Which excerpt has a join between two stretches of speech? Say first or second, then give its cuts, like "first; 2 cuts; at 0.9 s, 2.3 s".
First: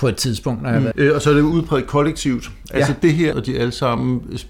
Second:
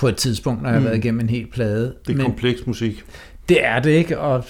first; 2 cuts; at 0.9 s, 3.3 s